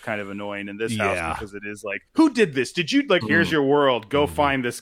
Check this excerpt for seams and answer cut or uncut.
cut